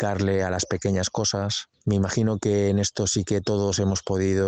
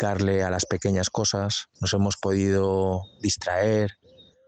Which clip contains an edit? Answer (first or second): second